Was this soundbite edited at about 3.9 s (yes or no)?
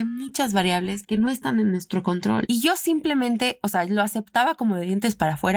no